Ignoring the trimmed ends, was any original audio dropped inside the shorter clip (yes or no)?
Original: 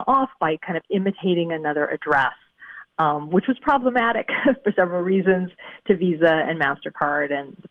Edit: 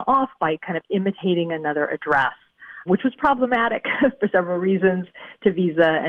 yes